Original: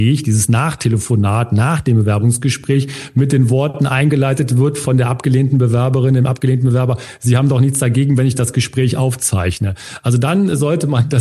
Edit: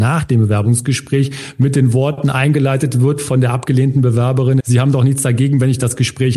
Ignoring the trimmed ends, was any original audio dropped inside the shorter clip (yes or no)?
yes